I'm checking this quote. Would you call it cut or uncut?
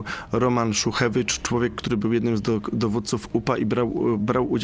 uncut